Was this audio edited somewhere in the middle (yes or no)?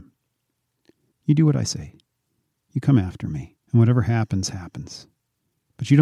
yes